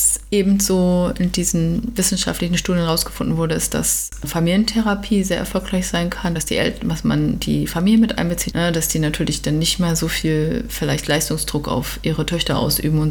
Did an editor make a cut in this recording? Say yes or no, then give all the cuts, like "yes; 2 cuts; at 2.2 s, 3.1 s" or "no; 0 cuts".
yes; 2 cuts; at 6.4 s, 8.5 s